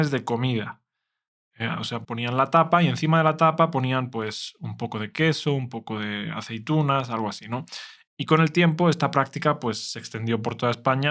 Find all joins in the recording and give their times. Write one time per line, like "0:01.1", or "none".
0:02.0
0:08.1